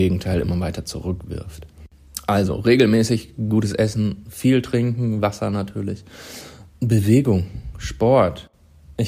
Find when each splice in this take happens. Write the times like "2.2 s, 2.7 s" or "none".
6.7 s